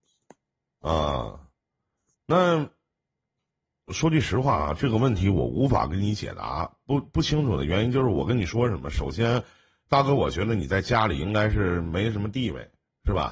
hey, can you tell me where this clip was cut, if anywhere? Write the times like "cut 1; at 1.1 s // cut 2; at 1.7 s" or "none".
none